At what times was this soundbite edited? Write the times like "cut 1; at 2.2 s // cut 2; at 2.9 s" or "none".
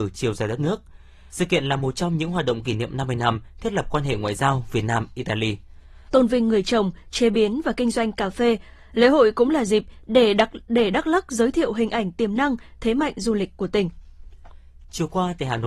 cut 1; at 1.3 s // cut 2; at 6.1 s